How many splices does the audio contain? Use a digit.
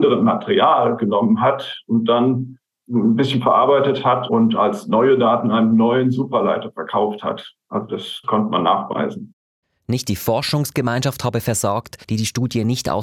1